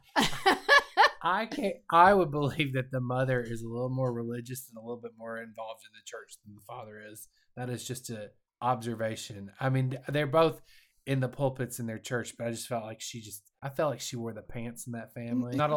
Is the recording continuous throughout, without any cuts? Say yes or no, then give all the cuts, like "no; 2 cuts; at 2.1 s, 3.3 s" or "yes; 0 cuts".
yes; 0 cuts